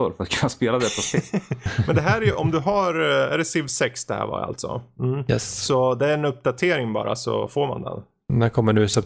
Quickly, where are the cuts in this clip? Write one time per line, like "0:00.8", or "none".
none